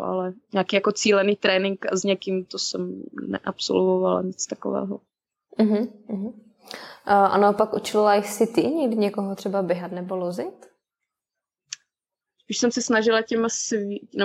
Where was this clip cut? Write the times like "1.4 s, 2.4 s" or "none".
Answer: 12.2 s